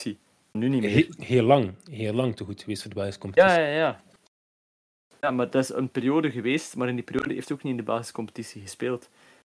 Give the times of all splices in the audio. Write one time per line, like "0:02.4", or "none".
none